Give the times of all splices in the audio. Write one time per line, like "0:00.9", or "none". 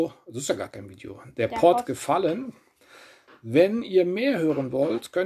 0:01.8

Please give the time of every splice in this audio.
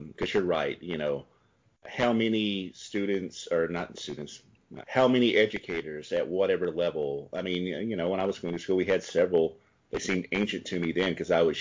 0:04.8

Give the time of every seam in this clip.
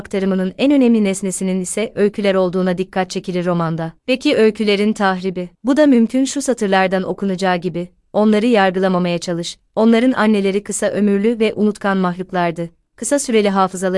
none

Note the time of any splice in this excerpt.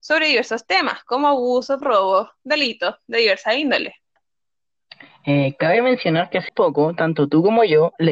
0:01.8
0:06.5

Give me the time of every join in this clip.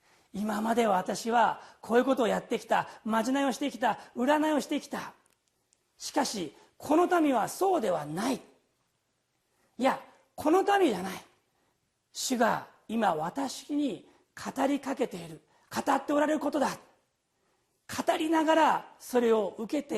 none

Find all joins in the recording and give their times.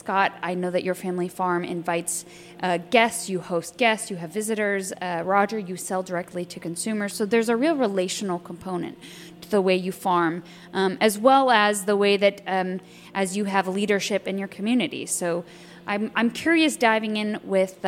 none

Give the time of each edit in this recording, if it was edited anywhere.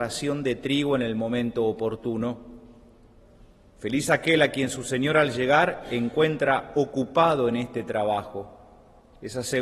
none

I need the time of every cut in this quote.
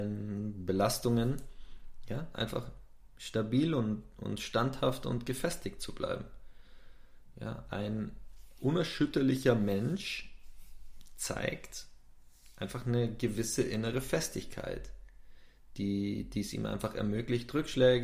none

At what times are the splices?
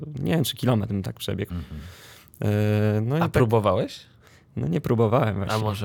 0:01.5

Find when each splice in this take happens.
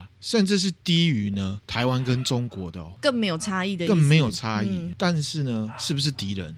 none

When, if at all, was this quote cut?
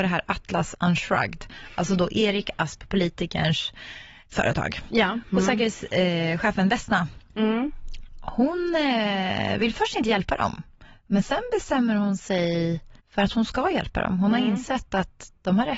0:13.0

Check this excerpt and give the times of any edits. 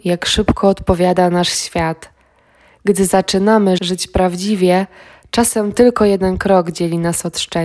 0:03.8

